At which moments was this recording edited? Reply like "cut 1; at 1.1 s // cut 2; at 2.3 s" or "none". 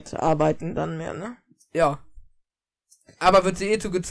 none

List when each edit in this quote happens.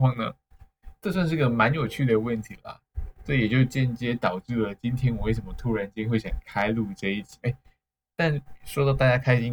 cut 1; at 1.0 s // cut 2; at 7.4 s

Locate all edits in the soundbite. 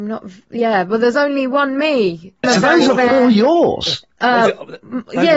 cut 1; at 2.4 s

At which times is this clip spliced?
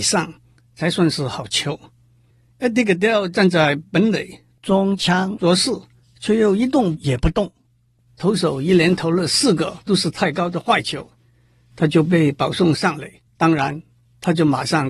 cut 1; at 13.3 s

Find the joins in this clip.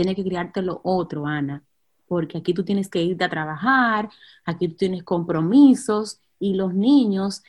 none

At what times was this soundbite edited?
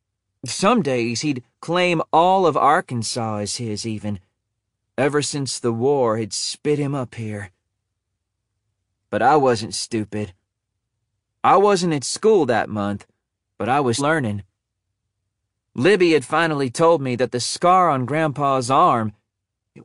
cut 1; at 14.0 s

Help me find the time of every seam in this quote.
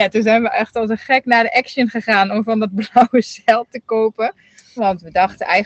cut 1; at 4.8 s

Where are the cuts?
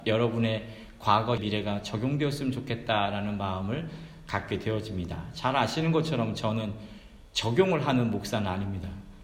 cut 1; at 1.4 s

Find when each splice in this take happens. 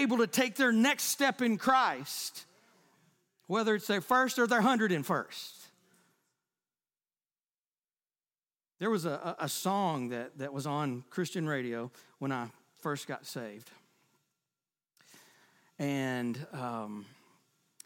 none

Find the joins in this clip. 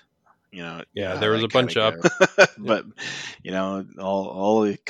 cut 1; at 2.0 s

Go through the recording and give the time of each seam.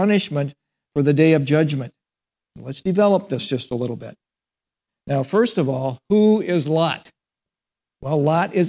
none

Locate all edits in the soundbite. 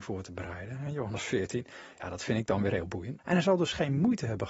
cut 1; at 3.2 s

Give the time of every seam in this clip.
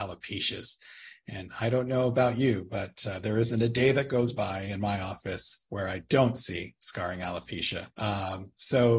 cut 1; at 7.9 s

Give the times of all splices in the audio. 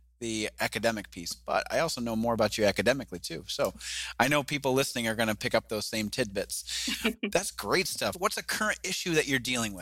cut 1; at 8.1 s

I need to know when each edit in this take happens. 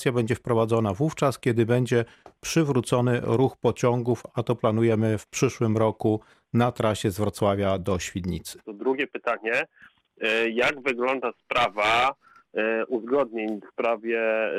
cut 1; at 8.6 s

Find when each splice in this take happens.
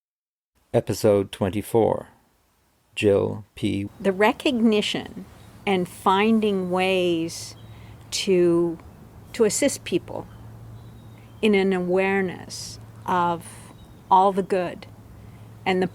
cut 1; at 3.9 s // cut 2; at 9.2 s

